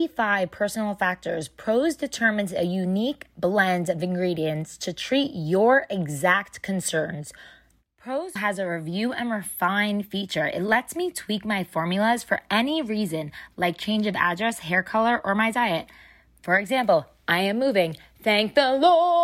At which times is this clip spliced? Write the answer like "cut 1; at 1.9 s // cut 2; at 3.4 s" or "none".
cut 1; at 8.4 s